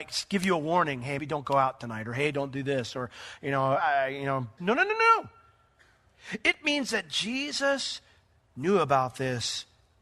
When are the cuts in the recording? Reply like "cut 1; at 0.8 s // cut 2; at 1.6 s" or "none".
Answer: cut 1; at 1.2 s // cut 2; at 4.6 s

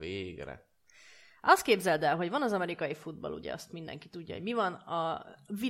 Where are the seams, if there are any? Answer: none

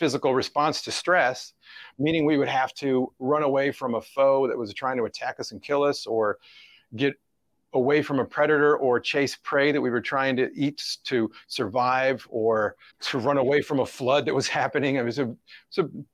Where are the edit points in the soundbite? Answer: cut 1; at 1.9 s // cut 2; at 12.9 s

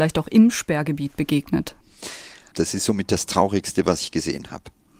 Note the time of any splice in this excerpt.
cut 1; at 2.5 s

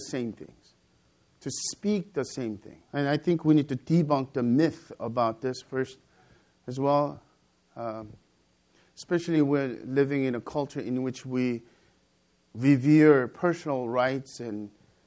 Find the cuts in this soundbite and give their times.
cut 1; at 2.9 s

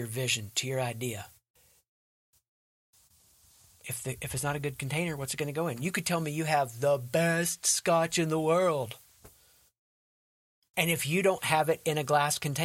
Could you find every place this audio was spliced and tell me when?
none

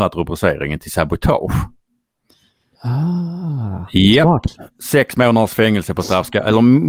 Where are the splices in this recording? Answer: none

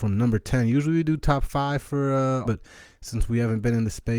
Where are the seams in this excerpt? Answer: cut 1; at 2.4 s

